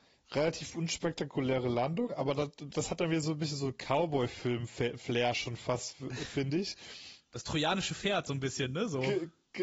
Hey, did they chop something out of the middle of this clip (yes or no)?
no